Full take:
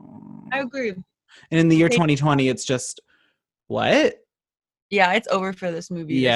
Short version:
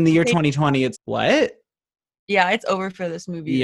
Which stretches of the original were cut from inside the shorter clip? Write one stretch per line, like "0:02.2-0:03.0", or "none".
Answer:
0:02.6-0:03.6